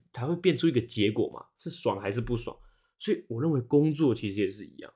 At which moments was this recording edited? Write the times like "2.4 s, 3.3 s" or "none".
none